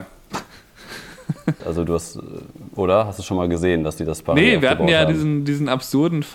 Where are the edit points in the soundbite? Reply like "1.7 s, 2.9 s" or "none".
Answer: 1.6 s